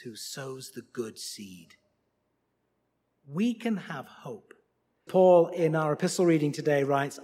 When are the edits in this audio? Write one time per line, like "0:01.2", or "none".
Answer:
0:05.1

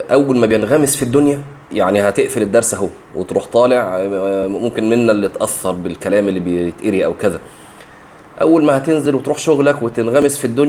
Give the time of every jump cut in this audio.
0:01.6

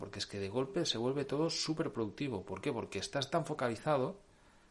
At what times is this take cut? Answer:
none

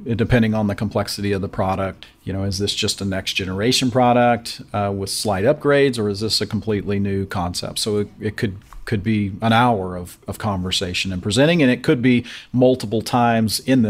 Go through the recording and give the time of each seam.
none

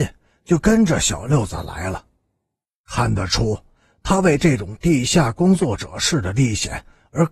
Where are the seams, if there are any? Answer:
none

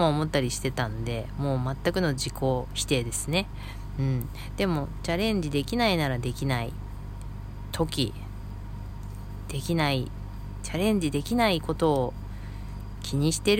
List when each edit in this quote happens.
none

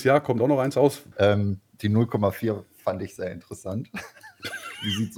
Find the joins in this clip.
0:01.1

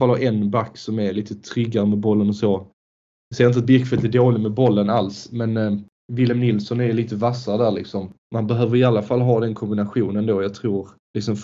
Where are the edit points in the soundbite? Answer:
none

